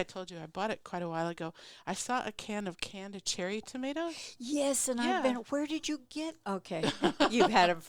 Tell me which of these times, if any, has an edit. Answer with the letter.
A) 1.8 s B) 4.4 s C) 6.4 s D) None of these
C